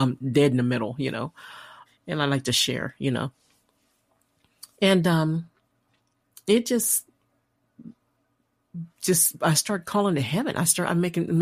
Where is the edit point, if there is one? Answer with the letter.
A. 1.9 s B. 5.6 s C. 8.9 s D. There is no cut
A